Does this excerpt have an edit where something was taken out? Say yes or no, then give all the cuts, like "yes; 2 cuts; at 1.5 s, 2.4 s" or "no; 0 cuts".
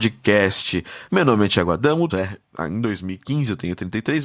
yes; 2 cuts; at 1.1 s, 2.1 s